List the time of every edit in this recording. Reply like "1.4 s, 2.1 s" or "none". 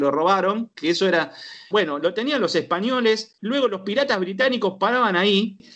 1.7 s